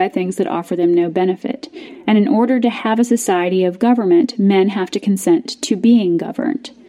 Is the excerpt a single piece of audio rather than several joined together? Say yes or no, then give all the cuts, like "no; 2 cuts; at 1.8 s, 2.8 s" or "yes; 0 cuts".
yes; 0 cuts